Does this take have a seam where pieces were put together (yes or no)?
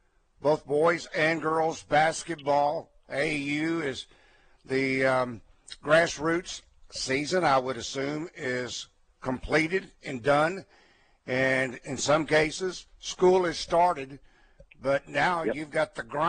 no